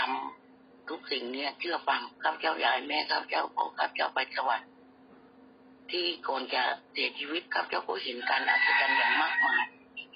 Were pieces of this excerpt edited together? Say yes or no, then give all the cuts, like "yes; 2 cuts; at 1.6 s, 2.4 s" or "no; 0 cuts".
yes; 2 cuts; at 2.1 s, 6.9 s